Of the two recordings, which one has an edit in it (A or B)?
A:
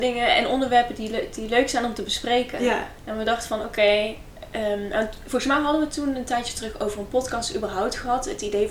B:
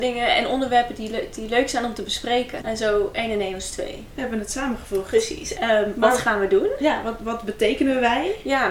B